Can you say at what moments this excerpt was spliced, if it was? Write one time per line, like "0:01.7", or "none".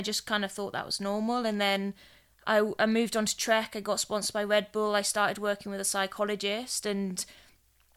none